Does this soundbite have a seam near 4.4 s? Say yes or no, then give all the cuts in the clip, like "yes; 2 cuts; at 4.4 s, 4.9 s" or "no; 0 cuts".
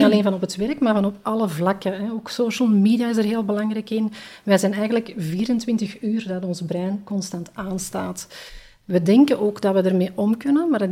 no; 0 cuts